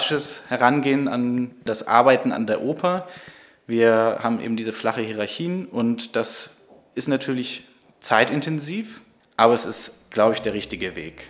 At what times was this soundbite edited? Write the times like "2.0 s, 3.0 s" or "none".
none